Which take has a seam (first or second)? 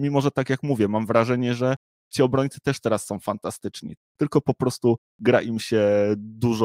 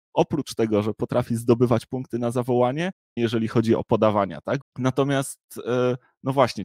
second